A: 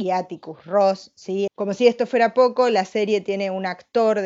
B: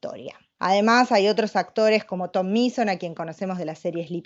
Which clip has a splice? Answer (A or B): A